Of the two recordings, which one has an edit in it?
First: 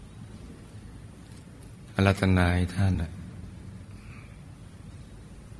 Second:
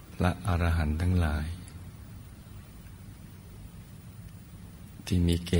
first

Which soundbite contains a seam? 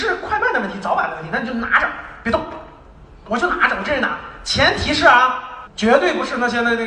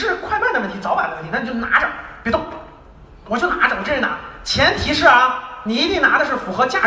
first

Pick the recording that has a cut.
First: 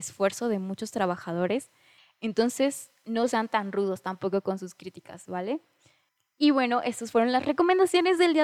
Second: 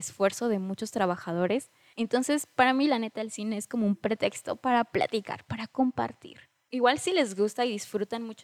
second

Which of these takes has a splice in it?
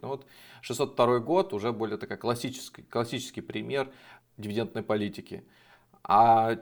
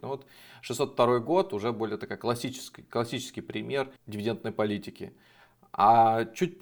second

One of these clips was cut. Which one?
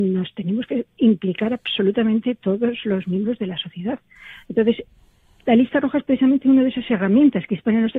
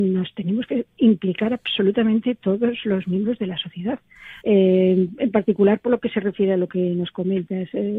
second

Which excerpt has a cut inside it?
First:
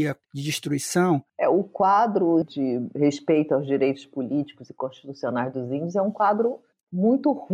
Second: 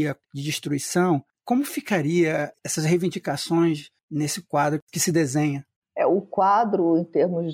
first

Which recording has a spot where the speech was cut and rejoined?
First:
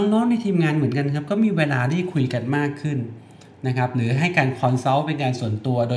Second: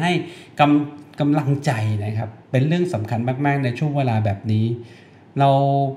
second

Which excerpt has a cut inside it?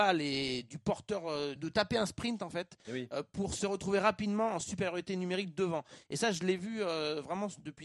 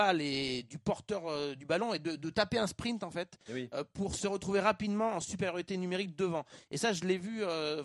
first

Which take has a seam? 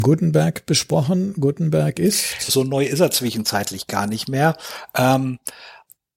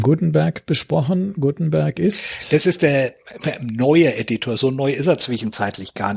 first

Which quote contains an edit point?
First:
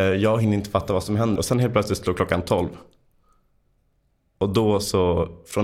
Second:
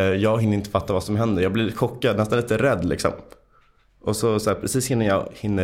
first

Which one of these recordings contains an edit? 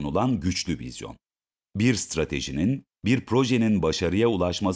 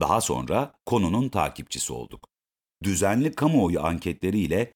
second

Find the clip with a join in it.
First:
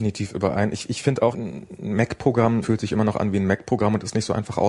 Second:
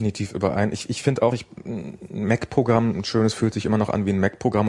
first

